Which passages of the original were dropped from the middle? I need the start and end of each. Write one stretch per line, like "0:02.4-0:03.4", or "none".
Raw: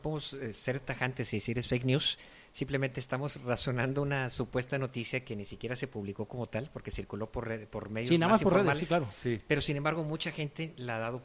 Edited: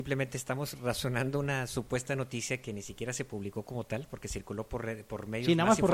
none